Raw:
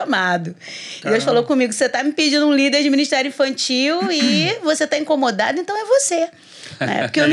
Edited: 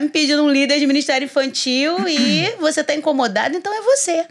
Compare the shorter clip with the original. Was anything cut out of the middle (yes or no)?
no